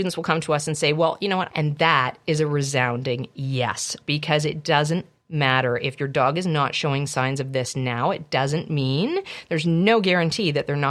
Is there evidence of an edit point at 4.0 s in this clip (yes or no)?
yes